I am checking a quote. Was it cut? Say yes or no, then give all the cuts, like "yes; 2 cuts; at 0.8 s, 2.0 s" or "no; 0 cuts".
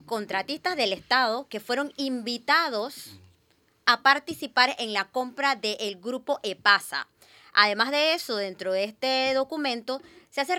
no; 0 cuts